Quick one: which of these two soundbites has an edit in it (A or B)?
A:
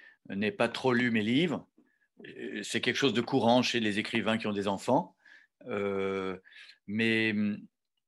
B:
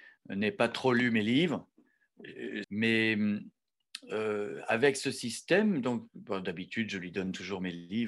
B